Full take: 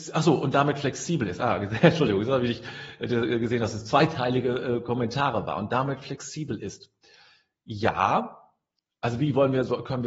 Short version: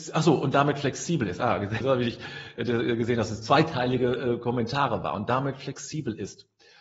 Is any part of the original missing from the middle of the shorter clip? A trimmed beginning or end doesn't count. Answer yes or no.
yes